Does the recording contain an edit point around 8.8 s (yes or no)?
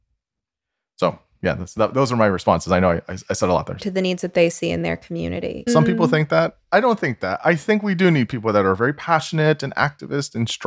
no